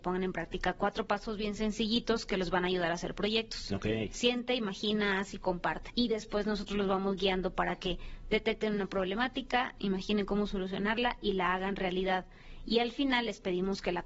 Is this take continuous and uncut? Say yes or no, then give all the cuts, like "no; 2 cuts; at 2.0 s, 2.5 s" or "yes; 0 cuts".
no; 1 cut; at 5.9 s